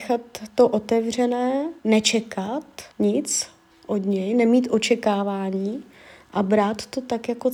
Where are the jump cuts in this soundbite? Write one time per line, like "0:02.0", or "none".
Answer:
0:01.8
0:02.9